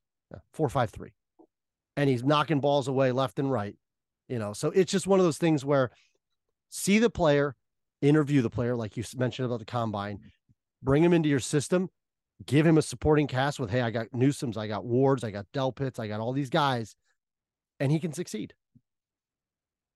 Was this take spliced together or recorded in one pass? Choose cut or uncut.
uncut